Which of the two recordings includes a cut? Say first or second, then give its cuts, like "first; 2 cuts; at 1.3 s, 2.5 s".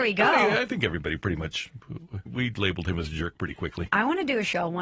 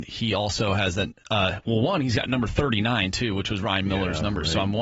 first; 1 cut; at 2.3 s